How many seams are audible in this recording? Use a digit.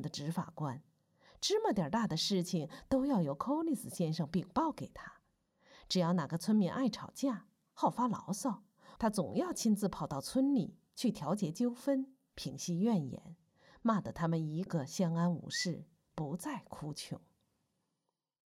2